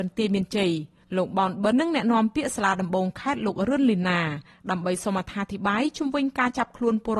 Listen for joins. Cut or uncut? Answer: cut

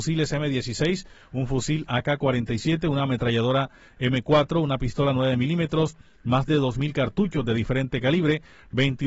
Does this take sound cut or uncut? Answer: uncut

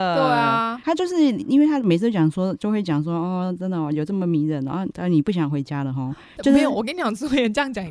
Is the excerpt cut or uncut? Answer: uncut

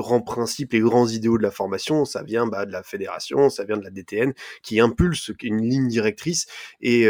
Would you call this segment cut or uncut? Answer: uncut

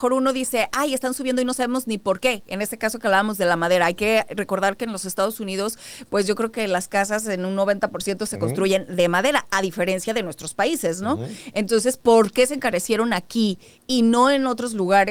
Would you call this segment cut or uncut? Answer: uncut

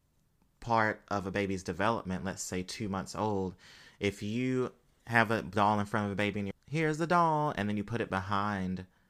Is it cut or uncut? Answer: cut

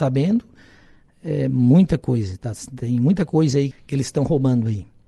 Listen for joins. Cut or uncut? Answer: cut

